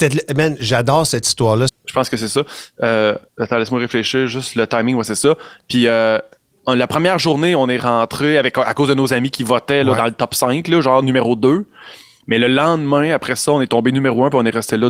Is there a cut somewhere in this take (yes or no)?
yes